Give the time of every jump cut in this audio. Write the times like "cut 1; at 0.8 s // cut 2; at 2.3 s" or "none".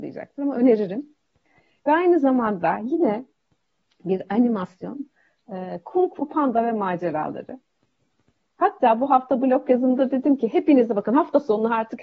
none

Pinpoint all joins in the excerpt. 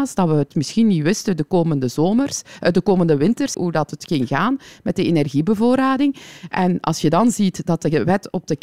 cut 1; at 3.5 s

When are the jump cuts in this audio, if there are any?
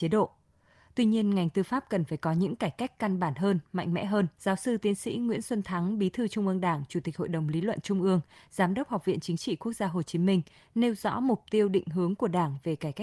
cut 1; at 4.3 s

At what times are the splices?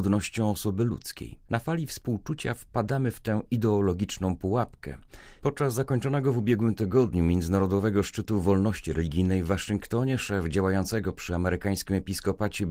cut 1; at 1.5 s // cut 2; at 5.4 s

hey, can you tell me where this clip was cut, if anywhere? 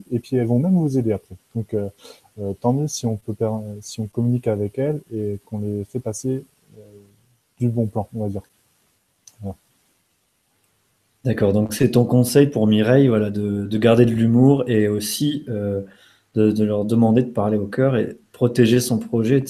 none

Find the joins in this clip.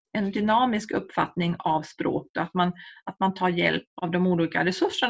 none

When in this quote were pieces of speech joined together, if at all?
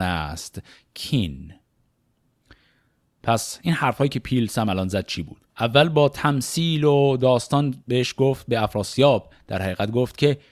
cut 1; at 5.5 s

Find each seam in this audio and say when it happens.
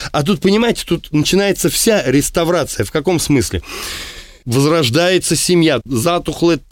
cut 1; at 4.4 s // cut 2; at 5.8 s

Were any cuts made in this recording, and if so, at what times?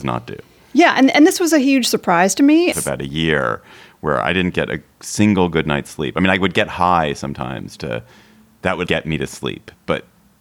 cut 1; at 2.7 s // cut 2; at 7.8 s // cut 3; at 8.9 s

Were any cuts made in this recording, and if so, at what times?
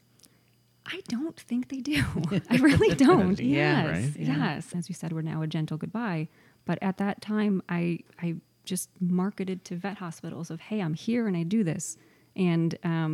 cut 1; at 3.4 s // cut 2; at 4.7 s

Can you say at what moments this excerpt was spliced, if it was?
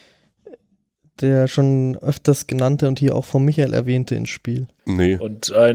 cut 1; at 4.8 s

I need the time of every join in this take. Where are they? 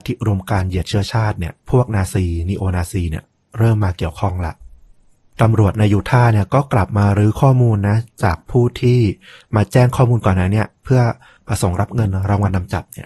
cut 1; at 1.6 s

